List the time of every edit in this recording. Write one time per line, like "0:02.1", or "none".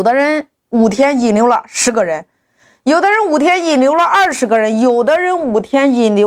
none